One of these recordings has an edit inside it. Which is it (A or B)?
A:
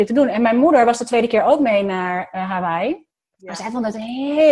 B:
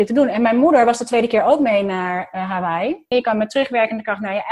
B